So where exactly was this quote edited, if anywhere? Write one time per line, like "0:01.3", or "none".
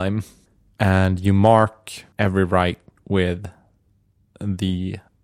0:02.1

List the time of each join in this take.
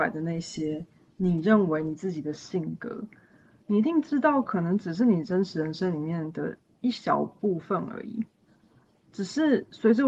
0:09.0

